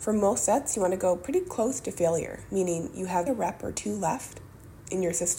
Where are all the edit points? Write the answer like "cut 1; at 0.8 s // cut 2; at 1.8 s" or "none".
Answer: cut 1; at 3.3 s